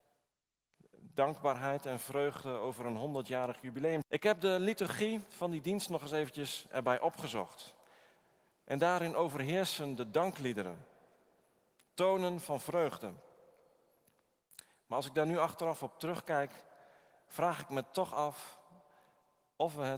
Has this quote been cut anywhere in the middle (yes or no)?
yes